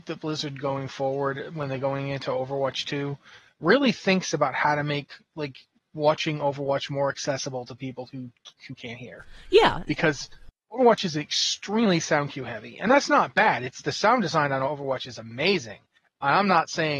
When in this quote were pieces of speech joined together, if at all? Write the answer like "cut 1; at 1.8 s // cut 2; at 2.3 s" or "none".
cut 1; at 8.6 s